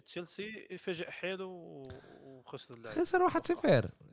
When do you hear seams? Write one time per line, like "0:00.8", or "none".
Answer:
none